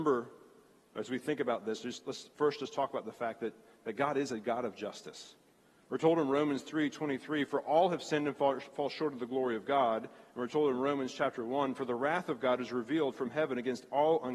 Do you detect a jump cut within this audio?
no; 0 cuts

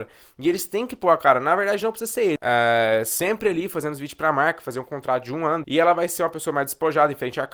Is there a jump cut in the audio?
yes; 2 cuts; at 2.4 s, 5.6 s

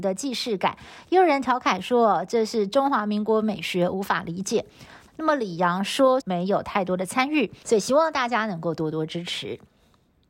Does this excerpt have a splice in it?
yes; 3 cuts; at 5.1 s, 6.2 s, 7.6 s

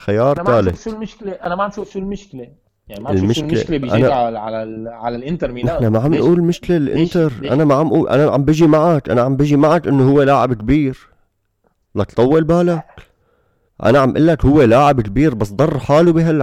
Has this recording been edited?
no; 0 cuts

